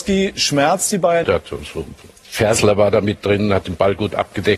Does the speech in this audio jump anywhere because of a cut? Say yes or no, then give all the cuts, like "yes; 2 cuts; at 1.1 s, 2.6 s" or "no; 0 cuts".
yes; 1 cut; at 1.2 s